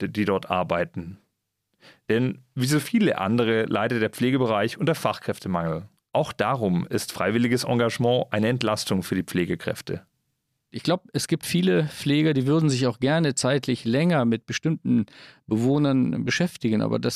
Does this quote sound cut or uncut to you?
uncut